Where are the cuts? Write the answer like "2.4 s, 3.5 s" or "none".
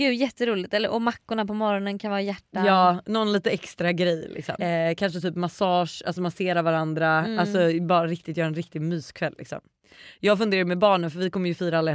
4.6 s